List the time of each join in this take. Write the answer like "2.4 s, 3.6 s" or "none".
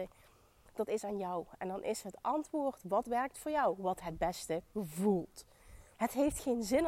5.9 s